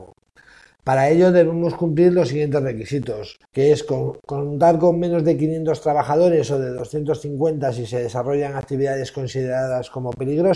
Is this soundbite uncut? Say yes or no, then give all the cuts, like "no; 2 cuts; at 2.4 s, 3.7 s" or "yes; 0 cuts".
no; 1 cut; at 3.5 s